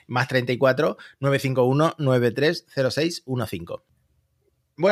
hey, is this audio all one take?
yes; 0 cuts

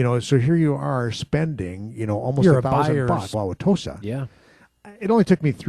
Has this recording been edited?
yes; 1 cut; at 3.3 s

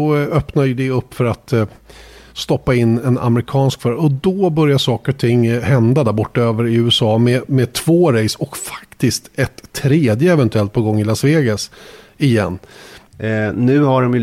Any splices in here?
yes; 1 cut; at 13.1 s

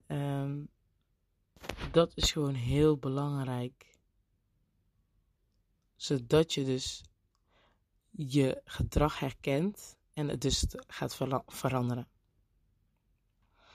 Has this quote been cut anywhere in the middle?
no; 0 cuts

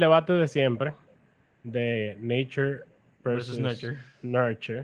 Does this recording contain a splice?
no; 0 cuts

